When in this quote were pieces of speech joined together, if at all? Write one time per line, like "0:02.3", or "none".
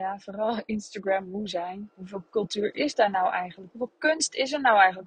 none

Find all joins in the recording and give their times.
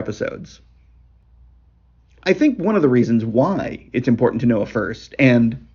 none

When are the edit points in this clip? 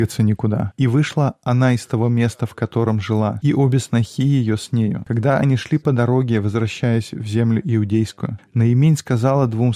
none

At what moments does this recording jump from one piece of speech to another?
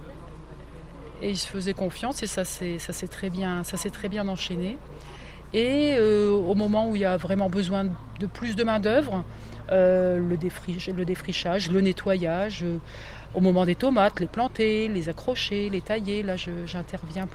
0:05.5

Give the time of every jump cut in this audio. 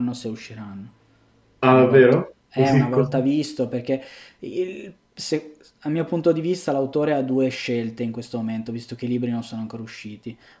none

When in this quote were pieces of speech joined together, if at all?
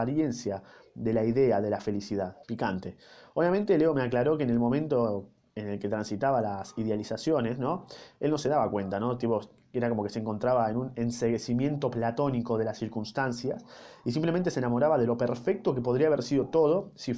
0:02.4

